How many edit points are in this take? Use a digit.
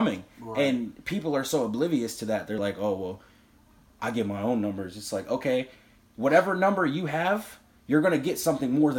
0